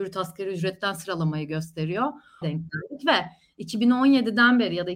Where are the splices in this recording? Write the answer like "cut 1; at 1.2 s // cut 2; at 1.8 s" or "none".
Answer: cut 1; at 2.4 s